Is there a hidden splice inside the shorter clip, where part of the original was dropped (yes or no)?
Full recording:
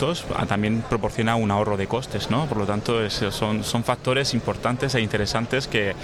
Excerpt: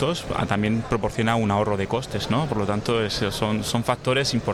no